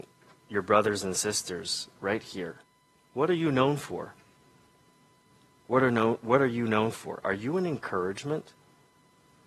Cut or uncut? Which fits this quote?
uncut